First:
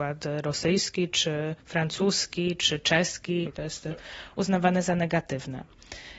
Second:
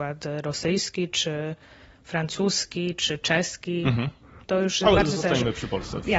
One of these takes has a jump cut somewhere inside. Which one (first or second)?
first